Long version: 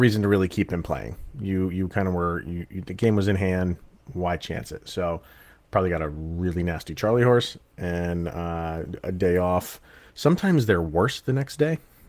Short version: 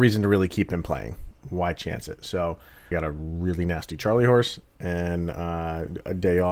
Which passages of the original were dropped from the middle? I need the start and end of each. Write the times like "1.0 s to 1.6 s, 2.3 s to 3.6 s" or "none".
1.3 s to 3.9 s, 5.5 s to 5.9 s